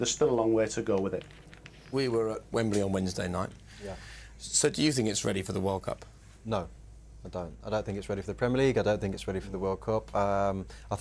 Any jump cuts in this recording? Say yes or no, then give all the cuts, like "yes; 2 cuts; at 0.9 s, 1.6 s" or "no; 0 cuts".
no; 0 cuts